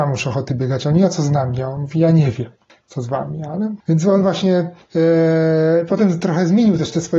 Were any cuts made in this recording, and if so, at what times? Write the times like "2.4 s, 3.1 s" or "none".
3.8 s